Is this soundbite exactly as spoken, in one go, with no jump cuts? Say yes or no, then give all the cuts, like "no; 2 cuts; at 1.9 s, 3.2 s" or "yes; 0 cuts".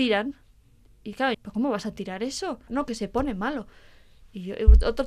no; 2 cuts; at 1.3 s, 2.7 s